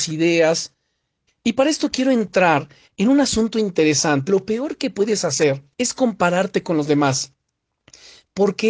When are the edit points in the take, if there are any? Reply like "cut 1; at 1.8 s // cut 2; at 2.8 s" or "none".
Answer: cut 1; at 1.3 s // cut 2; at 4.3 s // cut 3; at 5.7 s